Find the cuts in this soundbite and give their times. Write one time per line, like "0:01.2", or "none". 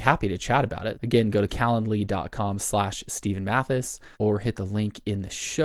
0:00.9
0:04.1